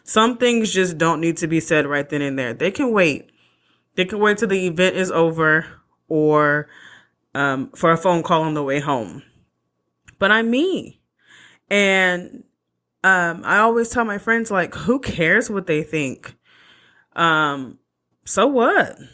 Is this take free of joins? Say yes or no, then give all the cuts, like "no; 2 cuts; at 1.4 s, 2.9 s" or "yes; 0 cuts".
yes; 0 cuts